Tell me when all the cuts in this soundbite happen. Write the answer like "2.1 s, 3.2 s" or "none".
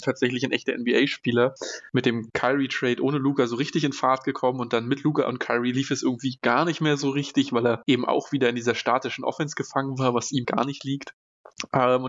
1.9 s, 10.4 s